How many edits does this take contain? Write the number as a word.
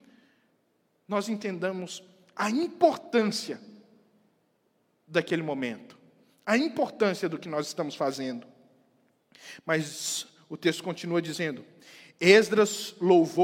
zero